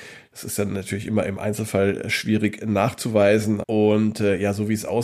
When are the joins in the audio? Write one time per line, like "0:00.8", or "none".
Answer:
0:03.6